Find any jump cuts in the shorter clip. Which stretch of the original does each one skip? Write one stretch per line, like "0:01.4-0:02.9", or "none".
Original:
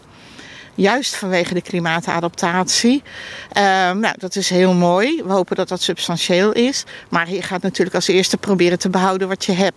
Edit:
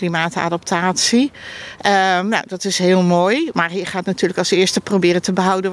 0:05.2-0:07.1